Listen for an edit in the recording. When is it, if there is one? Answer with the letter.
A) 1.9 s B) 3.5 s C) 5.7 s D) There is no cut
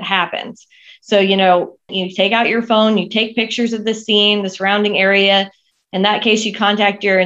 A